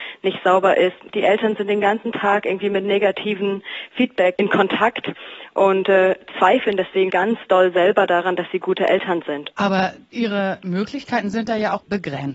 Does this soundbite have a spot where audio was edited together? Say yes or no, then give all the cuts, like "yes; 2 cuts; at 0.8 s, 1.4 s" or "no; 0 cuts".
yes; 2 cuts; at 7.1 s, 9.5 s